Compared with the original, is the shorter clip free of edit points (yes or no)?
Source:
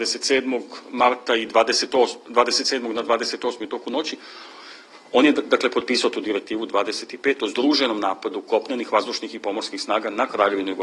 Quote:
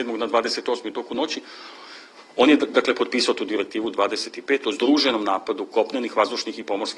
yes